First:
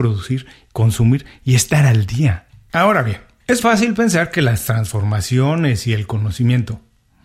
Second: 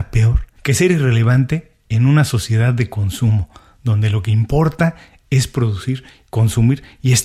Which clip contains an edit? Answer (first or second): first